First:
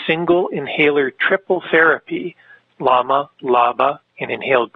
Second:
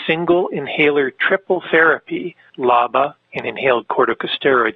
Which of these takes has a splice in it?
second; 1 cut; at 2.5 s

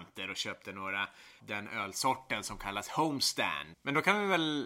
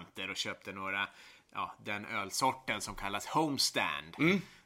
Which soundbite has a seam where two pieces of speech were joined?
first; 2 cuts; at 1.4 s, 3.7 s

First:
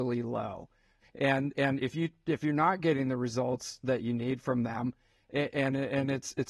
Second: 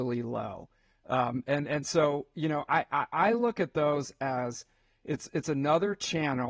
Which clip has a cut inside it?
first; 1 cut; at 1.0 s

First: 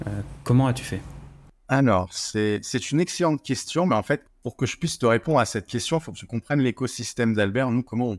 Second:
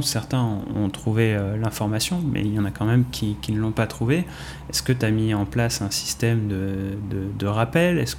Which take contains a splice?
first; 1 cut; at 4.3 s

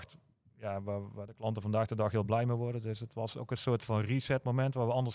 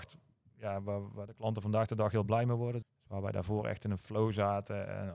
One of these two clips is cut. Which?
second; 1 cut; at 2.8 s

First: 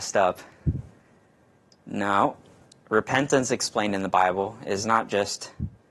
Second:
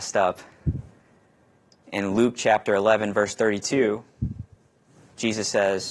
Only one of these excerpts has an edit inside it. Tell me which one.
second; 1 cut; at 1.8 s

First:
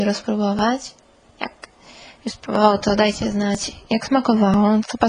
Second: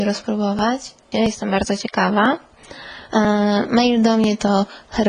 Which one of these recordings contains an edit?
second; 1 cut; at 1.1 s

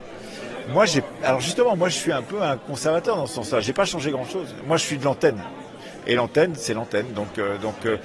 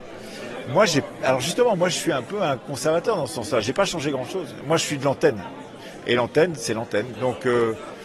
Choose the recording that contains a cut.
second; 1 cut; at 7.1 s

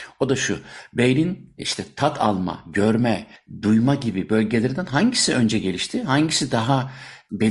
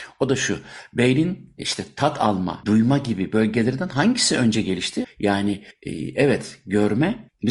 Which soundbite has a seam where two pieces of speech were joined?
second; 2 cuts; at 2.6 s, 5.0 s

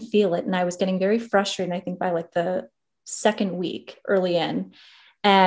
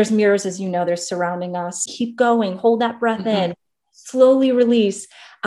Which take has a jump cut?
second; 1 cut; at 1.9 s

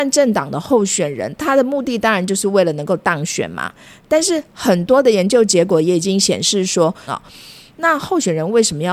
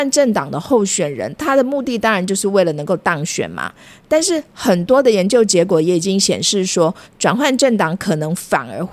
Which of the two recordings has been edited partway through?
first; 1 cut; at 7.1 s

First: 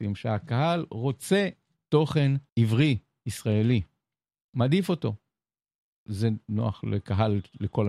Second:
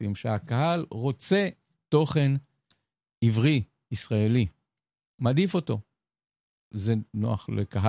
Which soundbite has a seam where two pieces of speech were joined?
first; 1 cut; at 2.5 s

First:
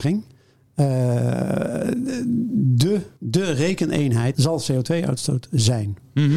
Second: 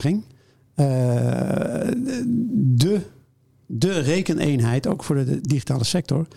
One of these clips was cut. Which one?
first; 2 cuts; at 3.2 s, 4.3 s

